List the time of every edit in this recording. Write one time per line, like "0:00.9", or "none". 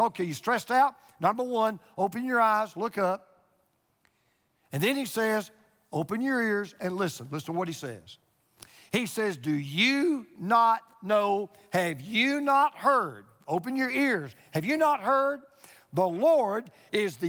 none